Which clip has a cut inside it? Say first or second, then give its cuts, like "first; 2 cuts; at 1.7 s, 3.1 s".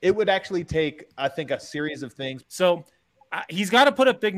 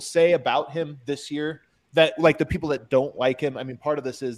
first; 1 cut; at 2.4 s